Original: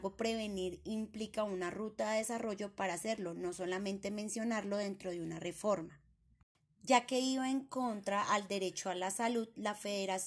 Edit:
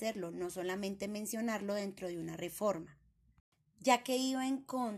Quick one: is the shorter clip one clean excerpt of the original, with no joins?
yes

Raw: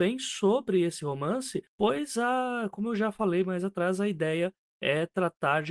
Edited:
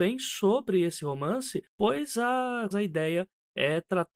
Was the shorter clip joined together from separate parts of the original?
yes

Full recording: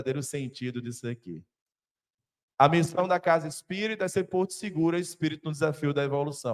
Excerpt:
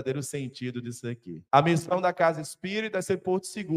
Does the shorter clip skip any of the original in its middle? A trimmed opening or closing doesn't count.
yes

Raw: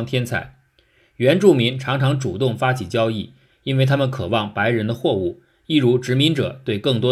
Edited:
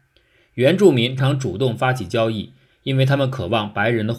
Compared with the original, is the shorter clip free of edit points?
no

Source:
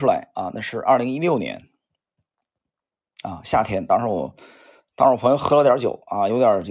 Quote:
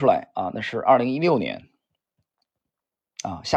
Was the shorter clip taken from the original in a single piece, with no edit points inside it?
yes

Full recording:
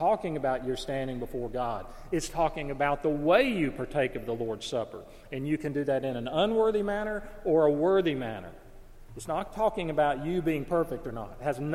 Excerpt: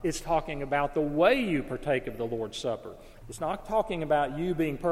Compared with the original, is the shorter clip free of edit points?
no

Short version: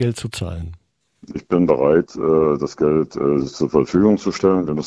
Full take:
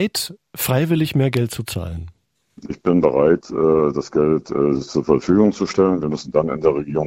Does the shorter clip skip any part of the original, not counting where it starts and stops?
no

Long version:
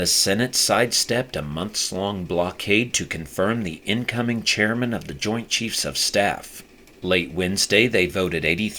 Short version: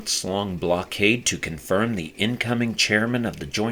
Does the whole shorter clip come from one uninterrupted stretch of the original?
yes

